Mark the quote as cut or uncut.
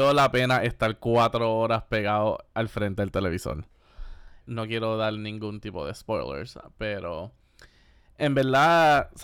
cut